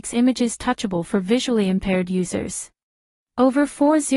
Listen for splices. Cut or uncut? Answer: cut